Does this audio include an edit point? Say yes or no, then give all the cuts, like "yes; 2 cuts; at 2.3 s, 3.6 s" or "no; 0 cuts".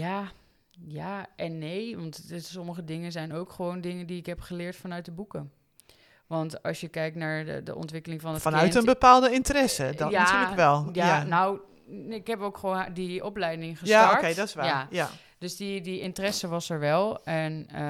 no; 0 cuts